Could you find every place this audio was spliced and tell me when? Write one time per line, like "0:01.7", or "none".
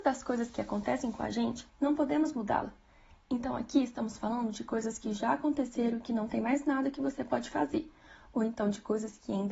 0:01.7